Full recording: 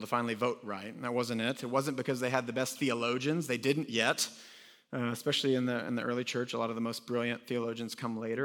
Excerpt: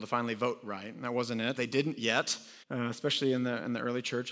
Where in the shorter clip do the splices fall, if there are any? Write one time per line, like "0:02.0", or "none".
0:01.6
0:02.6